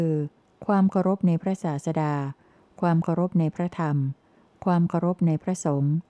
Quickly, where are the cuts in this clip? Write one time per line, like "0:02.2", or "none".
none